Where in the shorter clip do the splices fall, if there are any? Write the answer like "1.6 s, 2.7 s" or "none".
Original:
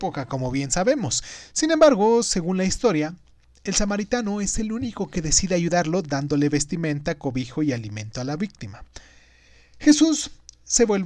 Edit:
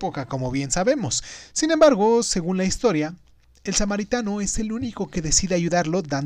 none